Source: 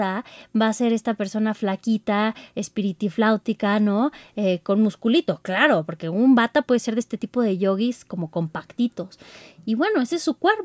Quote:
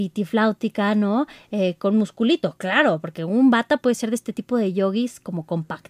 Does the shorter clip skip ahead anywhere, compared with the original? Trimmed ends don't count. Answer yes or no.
no